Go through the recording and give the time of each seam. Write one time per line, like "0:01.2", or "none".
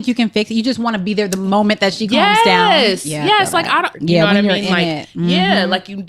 0:03.9